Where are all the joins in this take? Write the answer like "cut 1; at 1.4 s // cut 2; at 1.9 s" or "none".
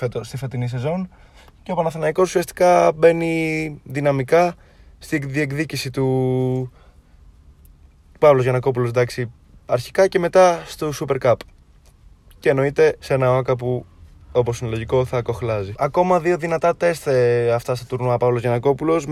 cut 1; at 13.0 s // cut 2; at 15.7 s